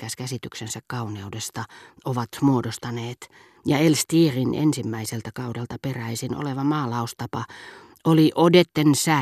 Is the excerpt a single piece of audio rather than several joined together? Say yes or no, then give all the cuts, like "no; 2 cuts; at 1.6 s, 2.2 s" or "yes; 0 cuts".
no; 1 cut; at 3.5 s